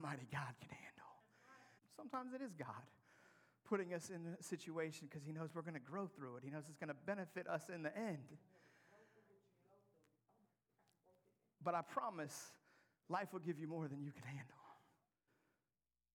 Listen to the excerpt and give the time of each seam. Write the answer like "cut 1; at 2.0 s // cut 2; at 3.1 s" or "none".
cut 1; at 1.8 s